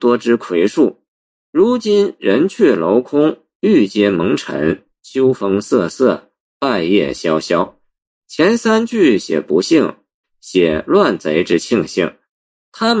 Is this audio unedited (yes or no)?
no